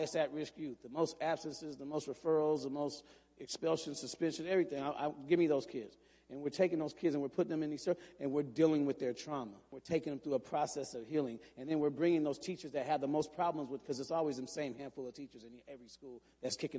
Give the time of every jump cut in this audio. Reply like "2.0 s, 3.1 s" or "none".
none